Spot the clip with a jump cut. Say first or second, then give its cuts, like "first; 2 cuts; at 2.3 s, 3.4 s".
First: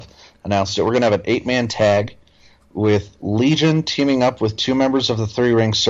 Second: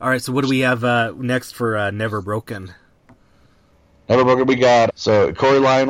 second; 1 cut; at 4.9 s